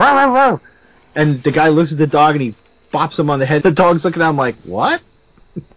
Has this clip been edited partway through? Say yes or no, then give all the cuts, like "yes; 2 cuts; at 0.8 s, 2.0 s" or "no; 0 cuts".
yes; 1 cut; at 3.6 s